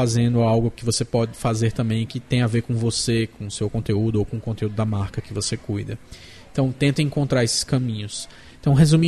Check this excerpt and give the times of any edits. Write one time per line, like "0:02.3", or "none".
none